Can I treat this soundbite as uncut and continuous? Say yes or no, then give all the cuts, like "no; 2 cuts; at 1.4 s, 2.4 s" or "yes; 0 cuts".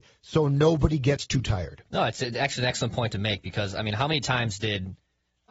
yes; 0 cuts